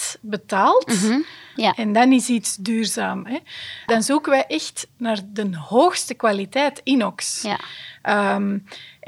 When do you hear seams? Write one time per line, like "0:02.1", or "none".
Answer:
0:01.6
0:03.9